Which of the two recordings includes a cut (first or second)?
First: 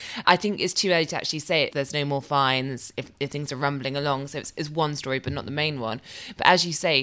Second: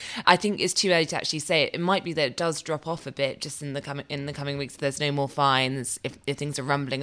first